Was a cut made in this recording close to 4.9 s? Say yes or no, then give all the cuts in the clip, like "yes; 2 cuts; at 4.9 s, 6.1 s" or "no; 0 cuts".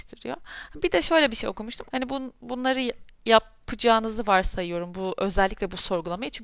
no; 1 cut; at 1.9 s